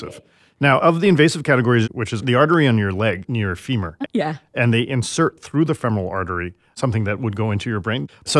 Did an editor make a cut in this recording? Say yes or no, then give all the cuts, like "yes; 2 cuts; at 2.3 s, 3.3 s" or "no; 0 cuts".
yes; 2 cuts; at 1.8 s, 4.0 s